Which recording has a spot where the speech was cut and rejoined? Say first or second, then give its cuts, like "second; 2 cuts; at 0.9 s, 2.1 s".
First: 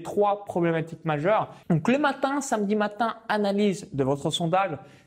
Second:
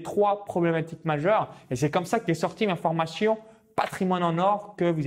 first; 1 cut; at 1.6 s